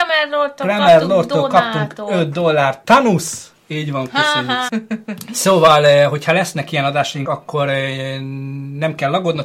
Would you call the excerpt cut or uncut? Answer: cut